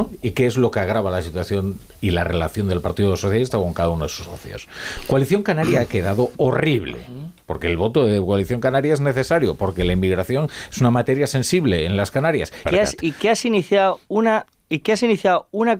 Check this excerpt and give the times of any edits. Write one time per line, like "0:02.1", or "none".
0:12.7

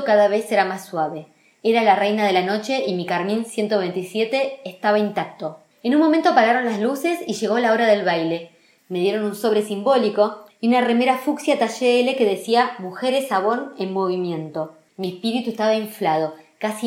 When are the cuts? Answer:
0:08.8
0:10.5

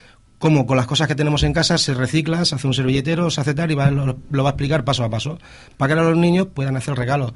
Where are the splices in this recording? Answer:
none

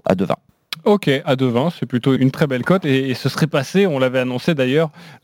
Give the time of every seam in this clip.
0:02.2

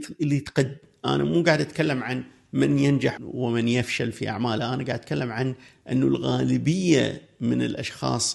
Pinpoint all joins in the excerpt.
0:03.2

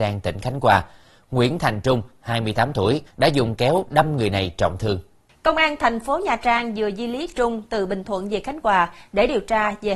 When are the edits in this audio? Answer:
0:03.1

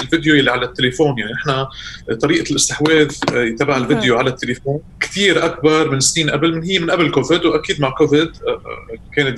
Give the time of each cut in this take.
0:04.9

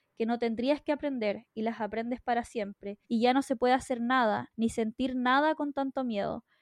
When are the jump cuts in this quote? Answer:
0:03.0
0:04.5

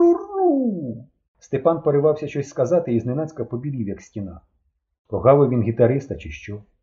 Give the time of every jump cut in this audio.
0:01.3
0:05.0

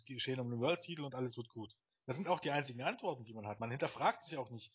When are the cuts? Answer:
none

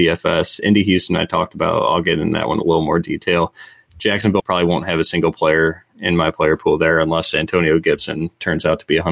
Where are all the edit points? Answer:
0:04.4

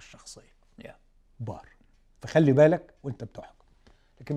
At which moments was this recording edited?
0:01.2

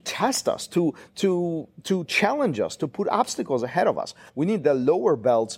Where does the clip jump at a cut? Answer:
0:04.3

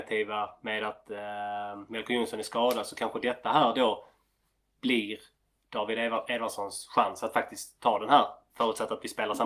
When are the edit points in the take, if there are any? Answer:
none

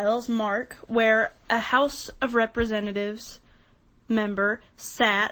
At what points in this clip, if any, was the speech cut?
none

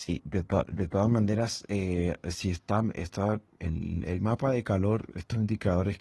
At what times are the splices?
0:03.6

